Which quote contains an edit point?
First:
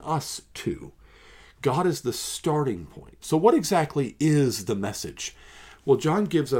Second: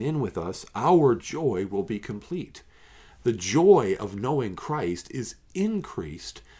first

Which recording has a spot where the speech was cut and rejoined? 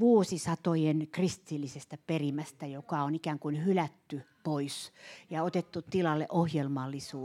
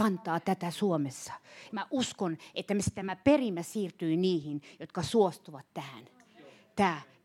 second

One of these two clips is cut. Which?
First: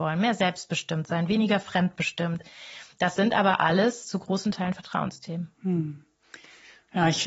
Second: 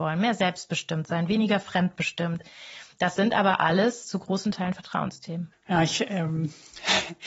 second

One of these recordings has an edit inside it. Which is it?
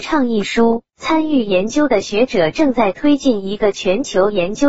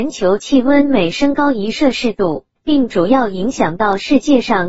second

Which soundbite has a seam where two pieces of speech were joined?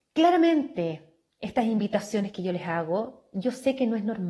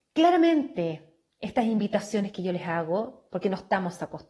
second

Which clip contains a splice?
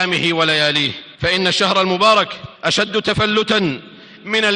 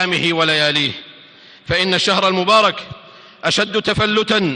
first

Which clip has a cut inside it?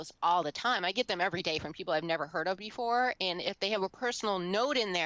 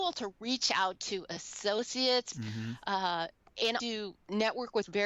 second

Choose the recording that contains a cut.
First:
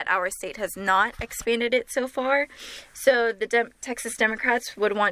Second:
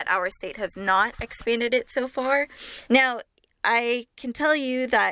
second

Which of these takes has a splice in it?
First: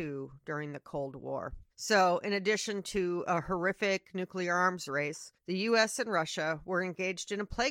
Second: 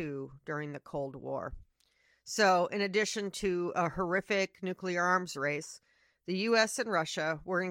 first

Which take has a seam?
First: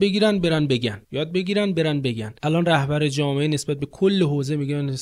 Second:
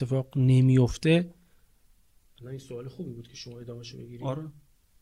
first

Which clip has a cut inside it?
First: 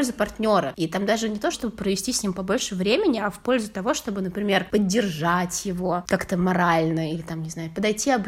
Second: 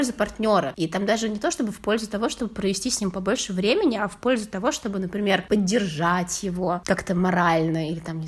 first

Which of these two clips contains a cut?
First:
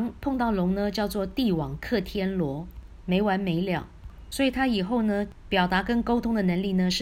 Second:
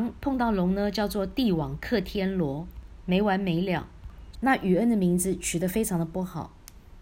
second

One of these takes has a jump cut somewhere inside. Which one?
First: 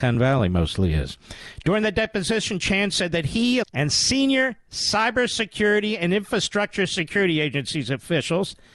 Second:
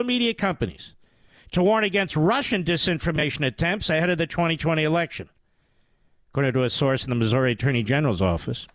first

